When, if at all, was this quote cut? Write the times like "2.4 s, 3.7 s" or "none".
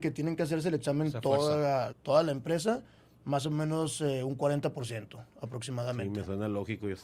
1.9 s